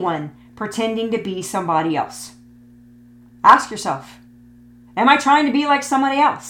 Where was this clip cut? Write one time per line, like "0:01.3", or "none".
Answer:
0:03.3

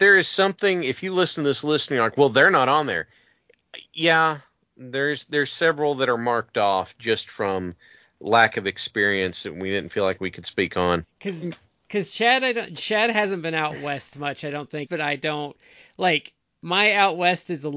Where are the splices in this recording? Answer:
0:11.0
0:14.9

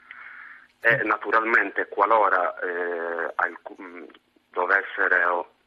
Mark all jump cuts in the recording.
none

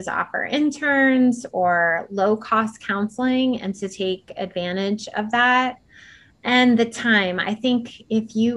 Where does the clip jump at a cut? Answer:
none

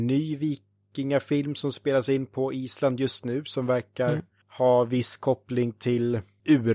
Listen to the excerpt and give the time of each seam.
none

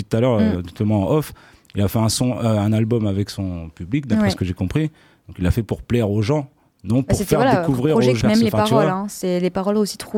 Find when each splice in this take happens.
0:08.2

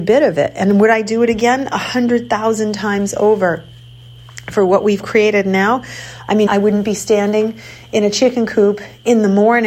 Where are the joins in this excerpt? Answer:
0:06.5

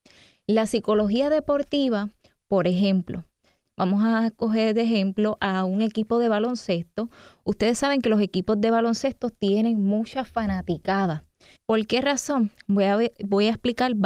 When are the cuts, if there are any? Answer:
0:03.6
0:11.6

